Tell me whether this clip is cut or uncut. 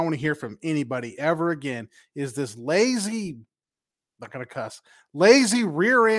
uncut